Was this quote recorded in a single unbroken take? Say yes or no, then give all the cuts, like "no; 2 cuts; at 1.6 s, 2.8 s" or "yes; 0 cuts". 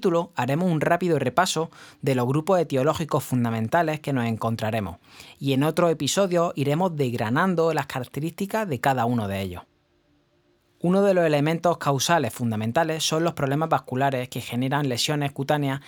yes; 0 cuts